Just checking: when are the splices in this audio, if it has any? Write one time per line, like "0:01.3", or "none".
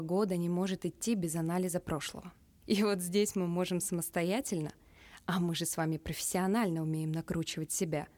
0:02.6